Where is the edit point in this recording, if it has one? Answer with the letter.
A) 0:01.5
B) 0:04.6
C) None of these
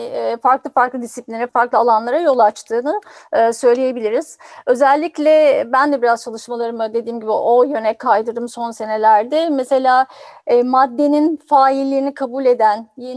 A